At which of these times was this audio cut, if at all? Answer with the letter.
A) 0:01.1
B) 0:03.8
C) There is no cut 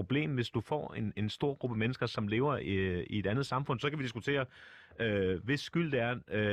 C